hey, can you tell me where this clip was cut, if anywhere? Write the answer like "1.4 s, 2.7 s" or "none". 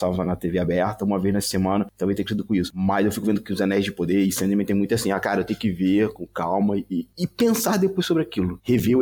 none